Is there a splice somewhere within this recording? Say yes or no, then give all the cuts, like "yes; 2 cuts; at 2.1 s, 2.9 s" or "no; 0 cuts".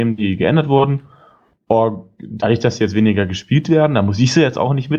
yes; 1 cut; at 2.4 s